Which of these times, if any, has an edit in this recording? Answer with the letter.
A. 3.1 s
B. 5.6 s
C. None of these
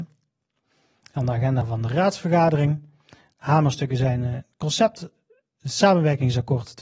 C